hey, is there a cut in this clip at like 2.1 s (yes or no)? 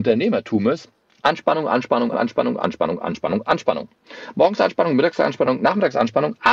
yes